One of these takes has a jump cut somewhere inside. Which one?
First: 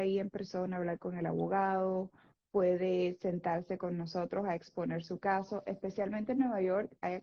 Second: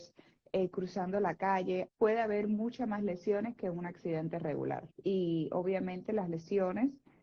second; 2 cuts; at 1.9 s, 4.9 s

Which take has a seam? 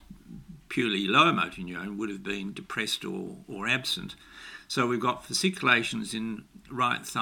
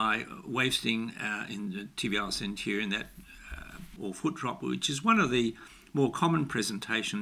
second; 1 cut; at 4.0 s

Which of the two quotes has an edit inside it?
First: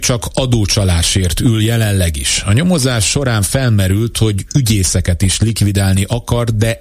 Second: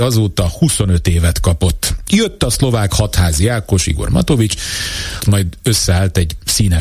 second; 2 cuts; at 2.0 s, 5.2 s

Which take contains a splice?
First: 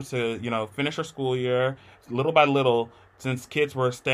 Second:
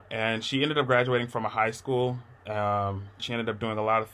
second; 1 cut; at 3.2 s

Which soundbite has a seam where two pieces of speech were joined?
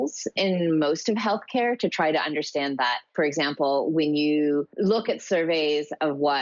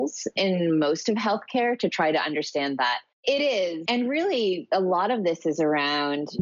second; 1 cut; at 3.1 s

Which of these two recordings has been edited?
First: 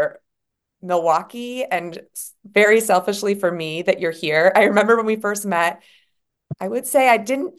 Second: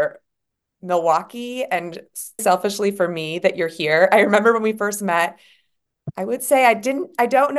second; 1 cut; at 2.4 s

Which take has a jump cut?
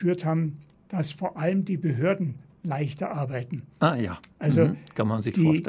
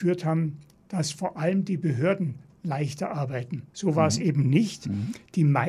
second; 1 cut; at 3.7 s

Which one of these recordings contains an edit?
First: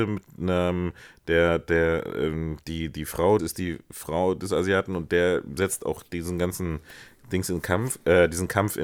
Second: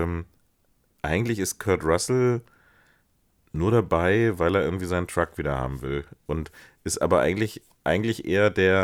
first; 1 cut; at 3.4 s

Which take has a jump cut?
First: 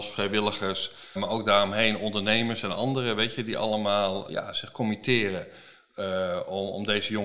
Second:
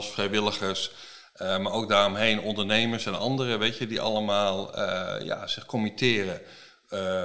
first; 2 cuts; at 1.2 s, 4.3 s

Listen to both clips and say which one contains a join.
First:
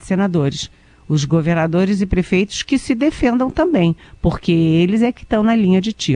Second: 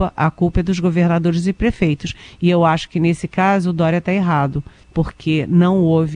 second; 1 cut; at 4.8 s

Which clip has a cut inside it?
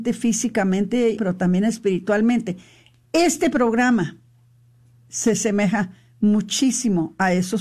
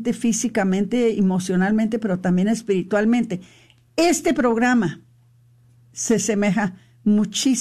first; 1 cut; at 1.2 s

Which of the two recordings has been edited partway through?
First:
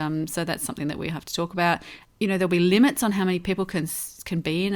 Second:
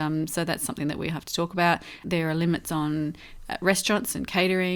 second; 1 cut; at 2.0 s

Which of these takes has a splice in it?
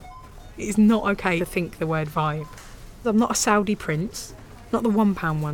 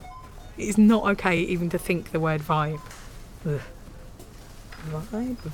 first; 2 cuts; at 1.4 s, 3.0 s

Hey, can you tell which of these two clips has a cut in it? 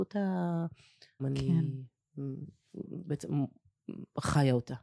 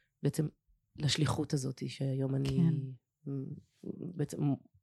first; 1 cut; at 1.2 s

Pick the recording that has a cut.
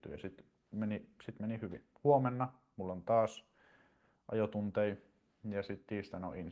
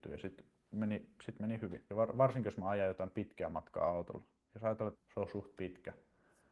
second; 2 cuts; at 1.9 s, 4.9 s

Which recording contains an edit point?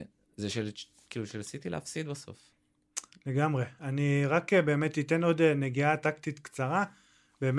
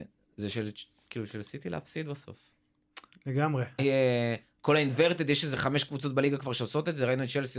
second; 1 cut; at 3.8 s

